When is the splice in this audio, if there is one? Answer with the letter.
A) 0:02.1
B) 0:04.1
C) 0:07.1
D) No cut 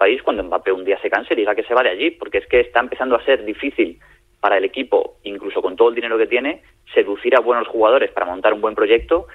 D